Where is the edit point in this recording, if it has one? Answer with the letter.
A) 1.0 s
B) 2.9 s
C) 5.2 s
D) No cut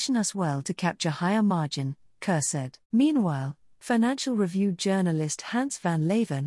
B